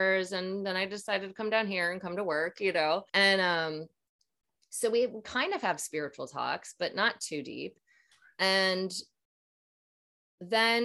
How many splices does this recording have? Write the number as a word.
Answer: one